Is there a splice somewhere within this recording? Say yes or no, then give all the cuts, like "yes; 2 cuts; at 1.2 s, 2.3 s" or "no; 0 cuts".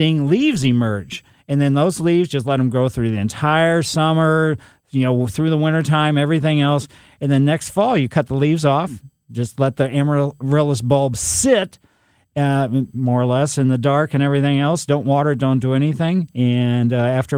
no; 0 cuts